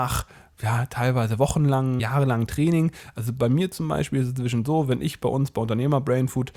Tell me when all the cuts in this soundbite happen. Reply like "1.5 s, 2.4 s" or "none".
2.0 s